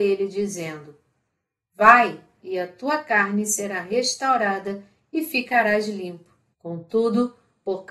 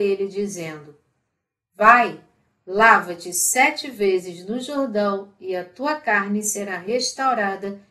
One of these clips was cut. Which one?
first; 2 cuts; at 2.4 s, 6.5 s

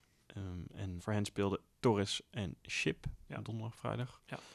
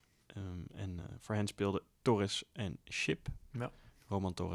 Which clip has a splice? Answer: first; 2 cuts; at 1.0 s, 3.3 s

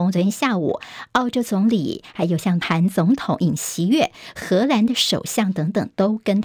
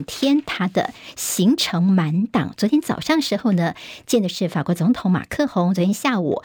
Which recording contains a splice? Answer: first; 1 cut; at 2.6 s

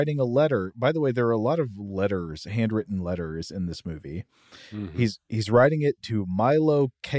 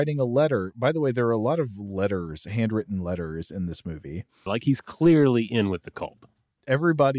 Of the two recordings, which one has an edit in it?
second; 1 cut; at 4.5 s

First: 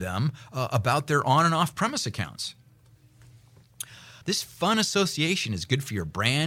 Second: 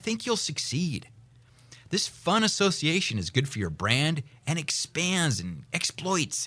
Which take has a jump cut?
first; 1 cut; at 4.2 s

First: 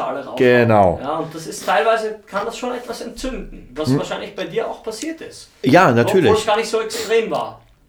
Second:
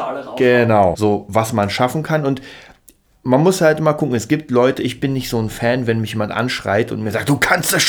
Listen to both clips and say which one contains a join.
second; 1 cut; at 0.9 s

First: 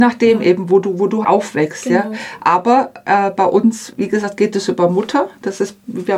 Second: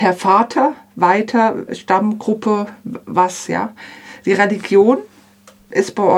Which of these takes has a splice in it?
first; 1 cut; at 1.2 s

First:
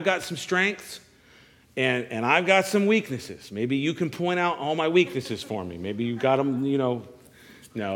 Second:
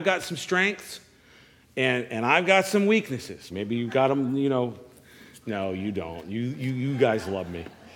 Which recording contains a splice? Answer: second; 1 cut; at 3.5 s

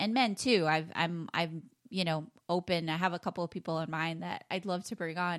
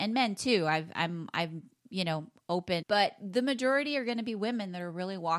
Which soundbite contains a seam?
second; 1 cut; at 2.8 s

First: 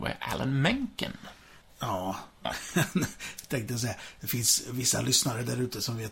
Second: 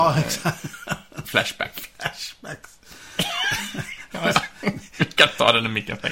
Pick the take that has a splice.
first; 1 cut; at 1.6 s

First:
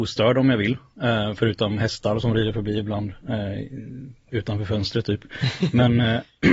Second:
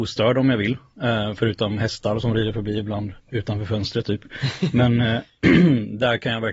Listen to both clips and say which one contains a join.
second; 1 cut; at 3.2 s

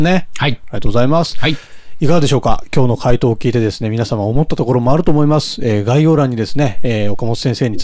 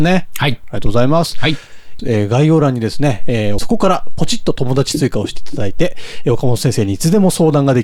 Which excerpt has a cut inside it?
second; 2 cuts; at 2.0 s, 3.6 s

